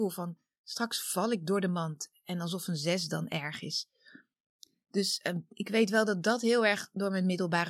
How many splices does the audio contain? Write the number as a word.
zero